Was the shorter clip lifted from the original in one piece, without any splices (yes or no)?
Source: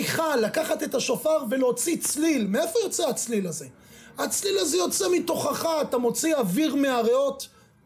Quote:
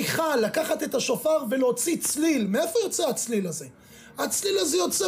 yes